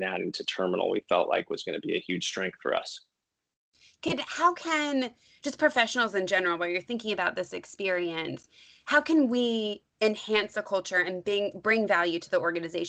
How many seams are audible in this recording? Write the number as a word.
zero